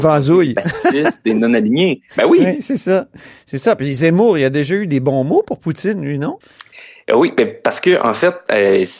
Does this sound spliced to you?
no; 0 cuts

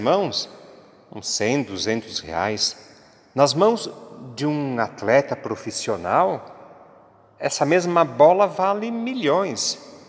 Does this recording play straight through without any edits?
yes; 0 cuts

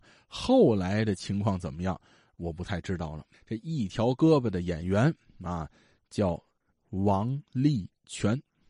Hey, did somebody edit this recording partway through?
yes; 1 cut; at 3.3 s

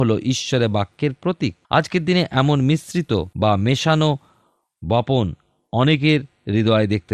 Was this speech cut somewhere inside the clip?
yes; 2 cuts; at 1.6 s, 3.3 s

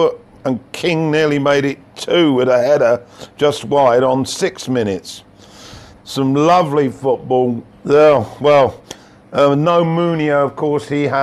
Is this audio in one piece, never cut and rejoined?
no; 2 cuts; at 6.0 s, 7.7 s

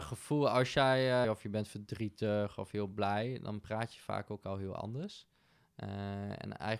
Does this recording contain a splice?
yes; 1 cut; at 1.2 s

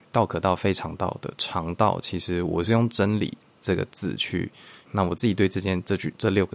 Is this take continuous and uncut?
no; 1 cut; at 4.9 s

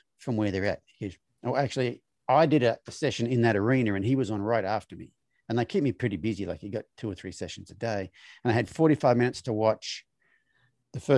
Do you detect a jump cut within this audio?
yes; 1 cut; at 1.3 s

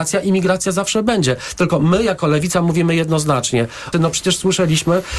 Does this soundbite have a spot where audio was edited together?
yes; 1 cut; at 3.9 s

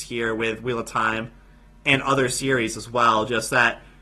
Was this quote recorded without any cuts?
yes; 0 cuts

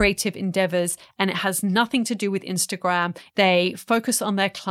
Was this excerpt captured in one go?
no; 1 cut; at 3.3 s

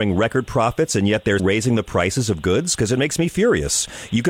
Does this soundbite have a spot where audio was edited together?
yes; 1 cut; at 1.4 s

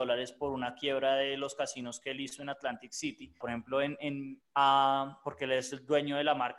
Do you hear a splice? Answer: yes; 2 cuts; at 3.4 s, 4.4 s

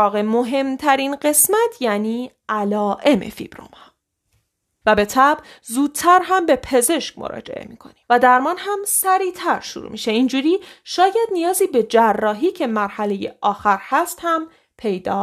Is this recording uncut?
no; 2 cuts; at 4.8 s, 8.0 s

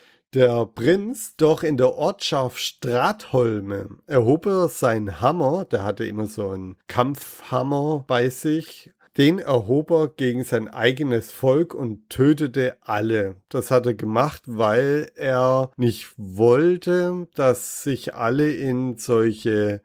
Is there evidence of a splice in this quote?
yes; 1 cut; at 1.3 s

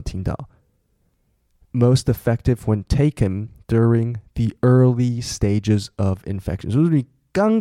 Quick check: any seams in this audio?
no; 0 cuts

